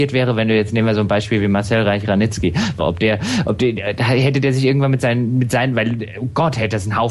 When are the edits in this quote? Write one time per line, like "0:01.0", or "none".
0:02.8